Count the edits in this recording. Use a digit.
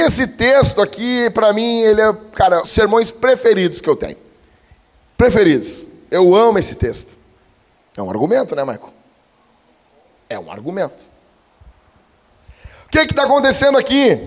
2